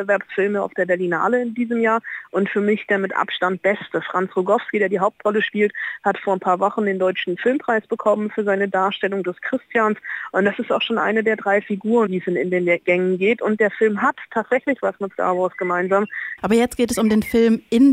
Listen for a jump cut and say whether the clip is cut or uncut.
cut